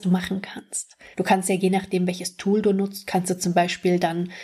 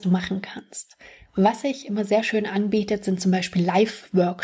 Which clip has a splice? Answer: first; 1 cut; at 1.1 s

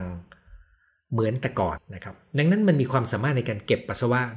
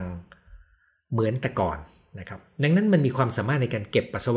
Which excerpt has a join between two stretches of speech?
first; 1 cut; at 1.8 s

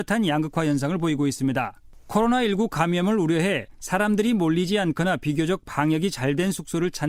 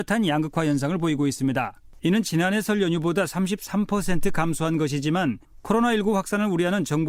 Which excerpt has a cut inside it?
second; 1 cut; at 2.0 s

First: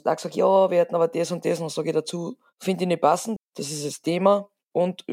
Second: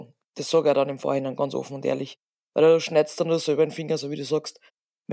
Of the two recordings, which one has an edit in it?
first; 1 cut; at 3.4 s

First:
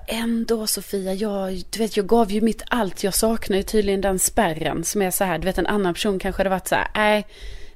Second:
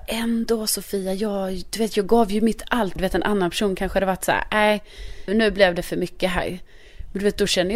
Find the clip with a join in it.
second; 2 cuts; at 3.0 s, 5.3 s

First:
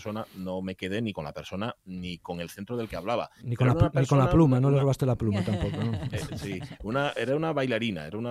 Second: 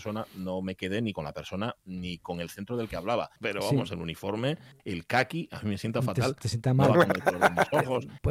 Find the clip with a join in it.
second; 1 cut; at 3.4 s

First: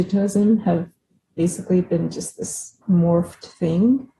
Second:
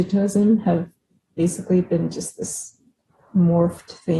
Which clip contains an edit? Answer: first; 1 cut; at 2.8 s

